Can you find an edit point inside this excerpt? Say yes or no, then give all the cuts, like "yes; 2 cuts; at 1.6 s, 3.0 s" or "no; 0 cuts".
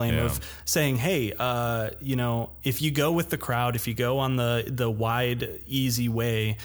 no; 0 cuts